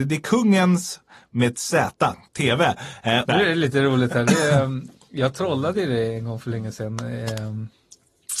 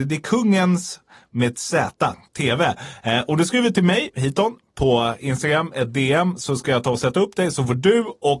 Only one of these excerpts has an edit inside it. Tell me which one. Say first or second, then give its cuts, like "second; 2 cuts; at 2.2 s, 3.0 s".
first; 1 cut; at 3.3 s